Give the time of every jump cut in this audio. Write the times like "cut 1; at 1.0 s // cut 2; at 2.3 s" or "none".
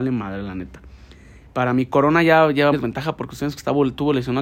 cut 1; at 1.4 s // cut 2; at 2.7 s